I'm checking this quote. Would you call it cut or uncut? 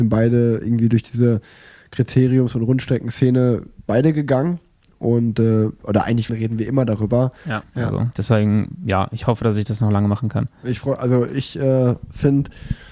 cut